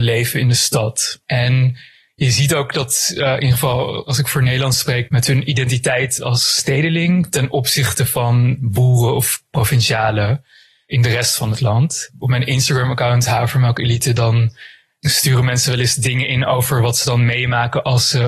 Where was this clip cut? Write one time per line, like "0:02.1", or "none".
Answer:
0:05.1